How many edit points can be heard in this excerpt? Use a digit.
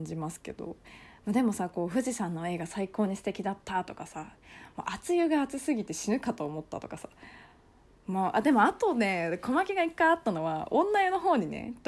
0